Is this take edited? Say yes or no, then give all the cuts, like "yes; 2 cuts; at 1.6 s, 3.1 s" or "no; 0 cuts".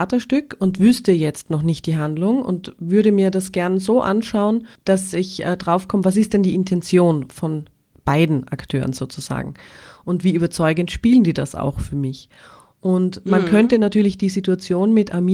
no; 0 cuts